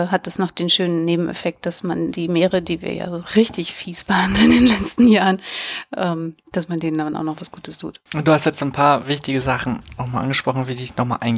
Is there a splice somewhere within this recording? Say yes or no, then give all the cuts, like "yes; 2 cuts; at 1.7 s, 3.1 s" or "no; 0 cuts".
yes; 1 cut; at 8.1 s